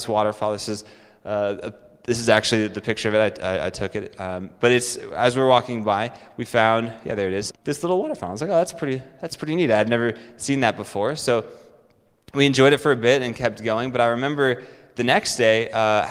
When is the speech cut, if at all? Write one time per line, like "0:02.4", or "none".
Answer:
0:07.5